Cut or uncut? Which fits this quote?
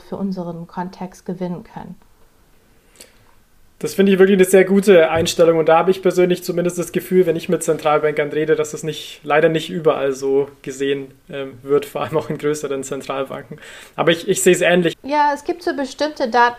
cut